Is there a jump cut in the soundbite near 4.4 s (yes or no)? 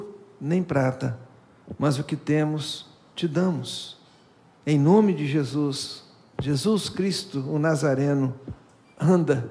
no